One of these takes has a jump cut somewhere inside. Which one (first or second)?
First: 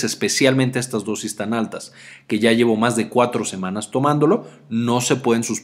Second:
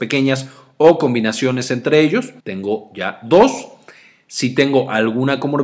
second